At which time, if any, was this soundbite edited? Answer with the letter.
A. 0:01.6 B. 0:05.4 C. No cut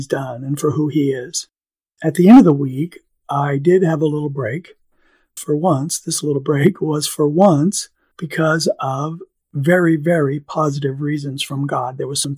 B